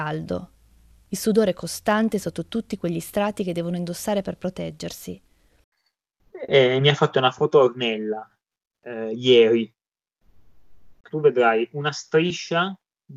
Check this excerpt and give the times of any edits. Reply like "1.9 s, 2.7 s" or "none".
11.1 s